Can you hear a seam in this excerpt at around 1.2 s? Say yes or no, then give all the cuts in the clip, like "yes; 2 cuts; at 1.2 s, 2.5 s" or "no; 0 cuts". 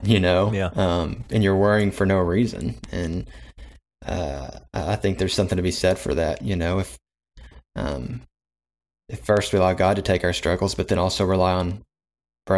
no; 0 cuts